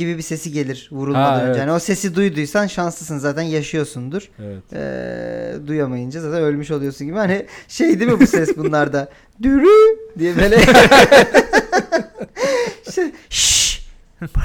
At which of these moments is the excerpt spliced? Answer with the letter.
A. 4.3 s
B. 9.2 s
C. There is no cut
A